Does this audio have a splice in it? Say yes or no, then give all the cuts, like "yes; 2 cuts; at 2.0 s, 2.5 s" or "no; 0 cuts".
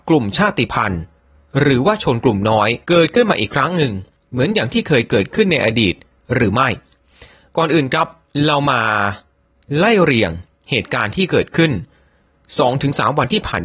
yes; 1 cut; at 2.8 s